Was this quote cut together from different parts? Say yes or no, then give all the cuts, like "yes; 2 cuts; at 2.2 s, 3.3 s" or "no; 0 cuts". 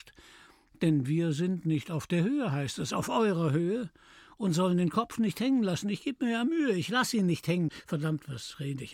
no; 0 cuts